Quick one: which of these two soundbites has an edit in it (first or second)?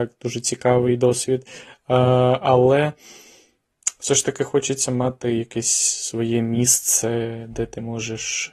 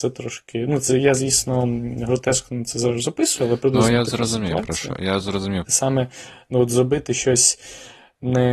second